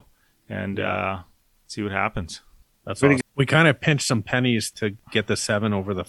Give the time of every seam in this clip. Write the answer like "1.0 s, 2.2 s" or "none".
3.2 s, 4.7 s